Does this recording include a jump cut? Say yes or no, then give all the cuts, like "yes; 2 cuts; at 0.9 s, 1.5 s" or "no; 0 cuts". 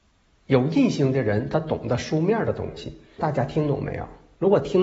yes; 1 cut; at 3.2 s